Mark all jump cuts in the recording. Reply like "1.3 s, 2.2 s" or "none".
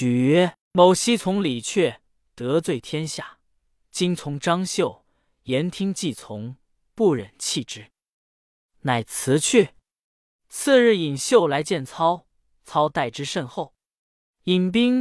none